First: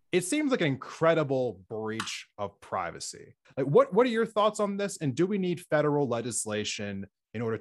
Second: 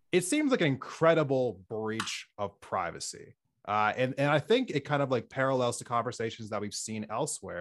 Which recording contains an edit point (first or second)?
first